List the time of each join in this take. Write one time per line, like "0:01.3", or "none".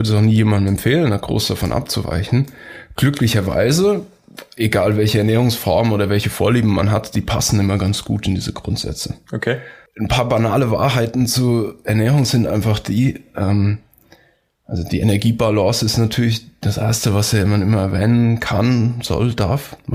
none